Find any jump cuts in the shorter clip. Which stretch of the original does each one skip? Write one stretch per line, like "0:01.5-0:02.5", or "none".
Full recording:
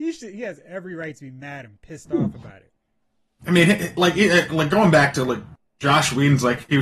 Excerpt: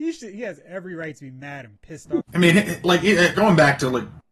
0:02.2-0:03.3
0:04.5-0:04.7